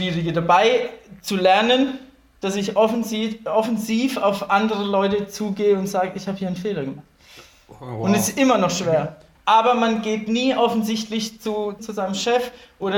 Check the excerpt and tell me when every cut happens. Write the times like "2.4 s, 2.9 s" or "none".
9.4 s, 11.8 s